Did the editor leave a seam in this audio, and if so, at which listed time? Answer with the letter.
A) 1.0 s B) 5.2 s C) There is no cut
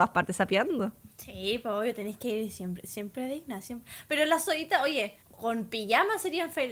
B